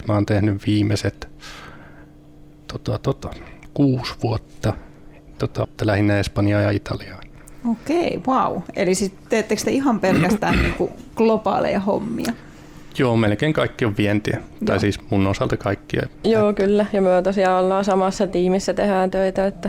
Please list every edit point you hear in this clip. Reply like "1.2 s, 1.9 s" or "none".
5.6 s, 16.2 s